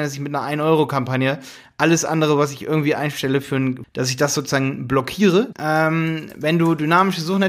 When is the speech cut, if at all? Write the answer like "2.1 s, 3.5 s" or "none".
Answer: 3.8 s, 5.5 s